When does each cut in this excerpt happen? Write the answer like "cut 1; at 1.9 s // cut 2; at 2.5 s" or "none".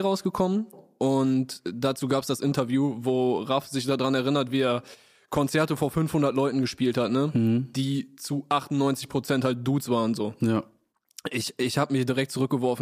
none